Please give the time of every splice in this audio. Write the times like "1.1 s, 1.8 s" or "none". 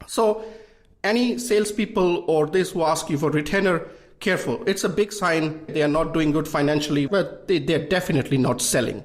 5.7 s, 7.1 s